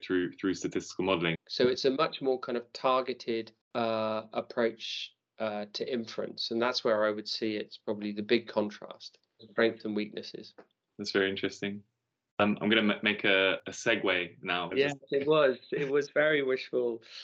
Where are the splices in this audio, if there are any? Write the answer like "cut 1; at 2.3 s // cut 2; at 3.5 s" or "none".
cut 1; at 1.3 s // cut 2; at 3.6 s // cut 3; at 14.7 s

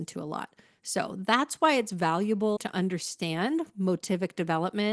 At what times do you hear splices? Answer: cut 1; at 2.6 s

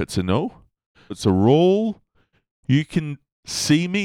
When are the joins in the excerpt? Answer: cut 1; at 1.1 s

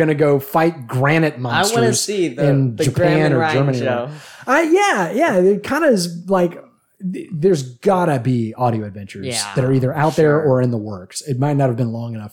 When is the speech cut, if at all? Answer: none

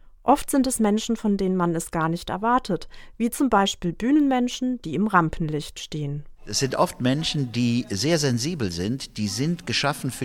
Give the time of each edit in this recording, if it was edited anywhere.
none

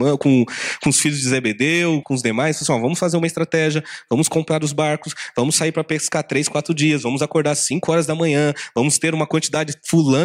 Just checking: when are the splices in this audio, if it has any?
cut 1; at 2.0 s

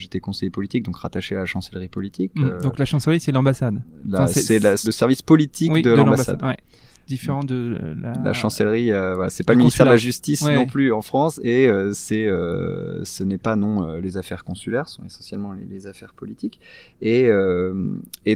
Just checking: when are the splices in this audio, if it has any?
cut 1; at 4.8 s

